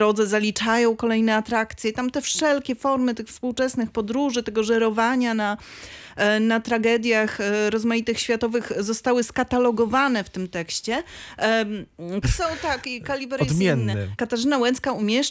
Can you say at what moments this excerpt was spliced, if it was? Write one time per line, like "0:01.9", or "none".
0:12.2
0:14.2

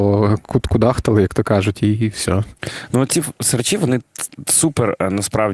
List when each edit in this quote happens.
none

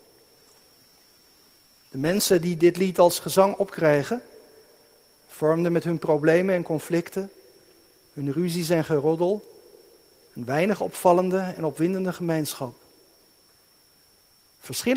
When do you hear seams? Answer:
none

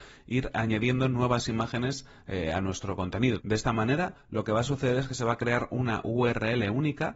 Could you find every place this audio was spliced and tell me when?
0:03.4

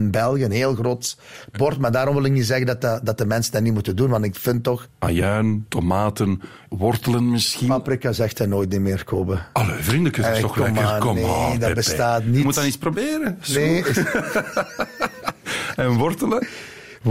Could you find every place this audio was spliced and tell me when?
0:04.9
0:06.7

